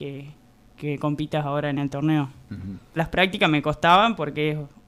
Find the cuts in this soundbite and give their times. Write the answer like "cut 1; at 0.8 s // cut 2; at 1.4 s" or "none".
cut 1; at 3.0 s